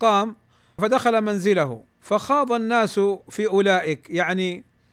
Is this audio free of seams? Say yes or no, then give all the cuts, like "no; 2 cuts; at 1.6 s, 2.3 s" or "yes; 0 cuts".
no; 1 cut; at 1.9 s